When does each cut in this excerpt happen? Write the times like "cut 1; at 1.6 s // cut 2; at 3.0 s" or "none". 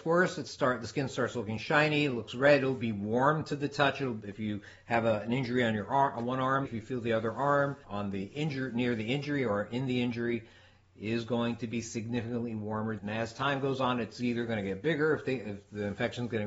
cut 1; at 6.6 s // cut 2; at 7.8 s // cut 3; at 13.0 s